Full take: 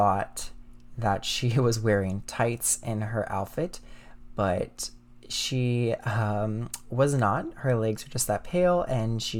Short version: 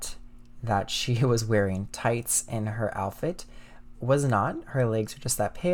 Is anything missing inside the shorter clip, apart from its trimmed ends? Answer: yes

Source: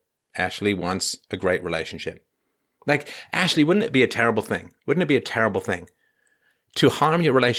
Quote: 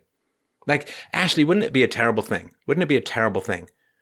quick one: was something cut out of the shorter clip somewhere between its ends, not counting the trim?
no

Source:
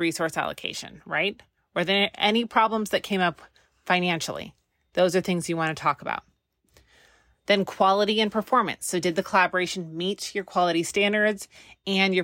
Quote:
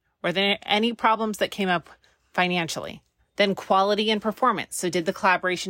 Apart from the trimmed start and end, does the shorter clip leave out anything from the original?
yes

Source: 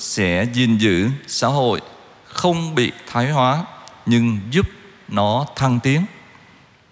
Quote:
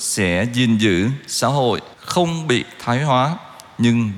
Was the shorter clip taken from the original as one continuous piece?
no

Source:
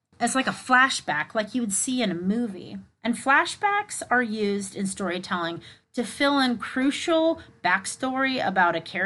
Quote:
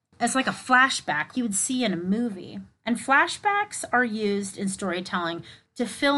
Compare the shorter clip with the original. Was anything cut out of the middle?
yes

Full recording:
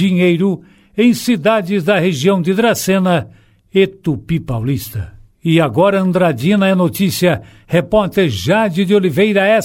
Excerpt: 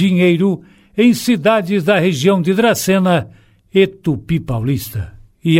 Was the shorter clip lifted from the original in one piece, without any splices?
yes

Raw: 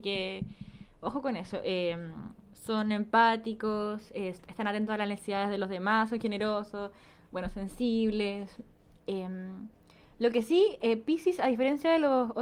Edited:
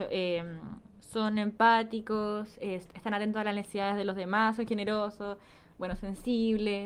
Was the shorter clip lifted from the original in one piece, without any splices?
yes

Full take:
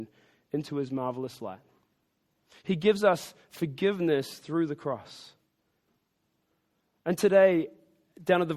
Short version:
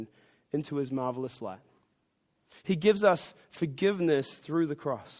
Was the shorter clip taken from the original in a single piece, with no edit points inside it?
yes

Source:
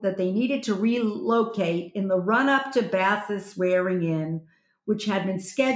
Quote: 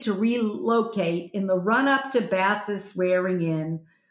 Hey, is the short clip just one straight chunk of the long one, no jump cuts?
yes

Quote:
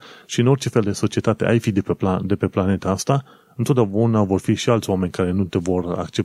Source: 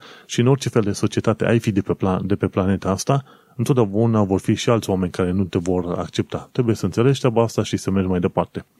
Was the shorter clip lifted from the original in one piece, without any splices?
yes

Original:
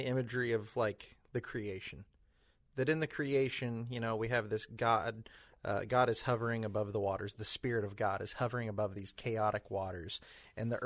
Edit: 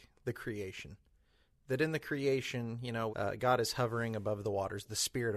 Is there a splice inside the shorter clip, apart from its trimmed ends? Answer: yes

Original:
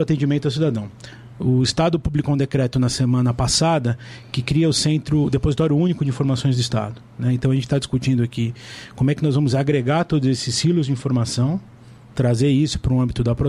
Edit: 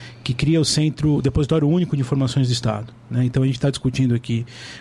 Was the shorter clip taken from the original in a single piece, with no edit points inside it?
yes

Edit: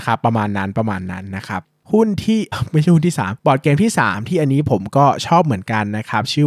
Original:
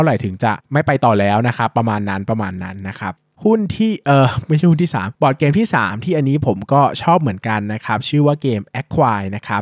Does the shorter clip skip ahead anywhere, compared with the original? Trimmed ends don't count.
yes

